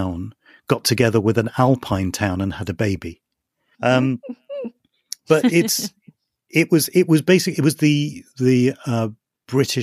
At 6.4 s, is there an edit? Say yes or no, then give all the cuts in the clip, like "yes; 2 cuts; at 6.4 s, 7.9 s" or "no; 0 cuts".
no; 1 cut; at 3.7 s